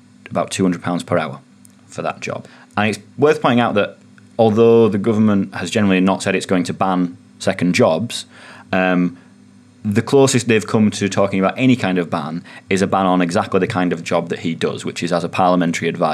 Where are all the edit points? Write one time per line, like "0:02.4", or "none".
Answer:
none